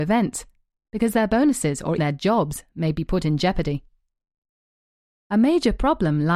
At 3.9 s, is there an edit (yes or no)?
no